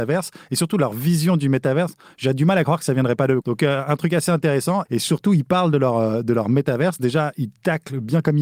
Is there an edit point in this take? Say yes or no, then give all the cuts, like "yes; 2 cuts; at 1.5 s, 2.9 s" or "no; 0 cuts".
yes; 2 cuts; at 3.4 s, 4.9 s